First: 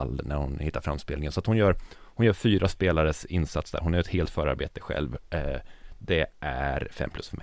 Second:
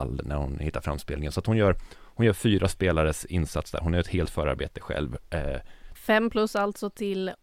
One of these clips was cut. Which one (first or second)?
second